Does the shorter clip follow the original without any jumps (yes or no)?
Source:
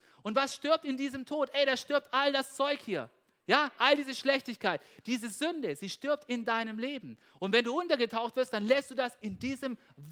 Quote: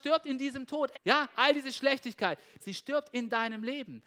no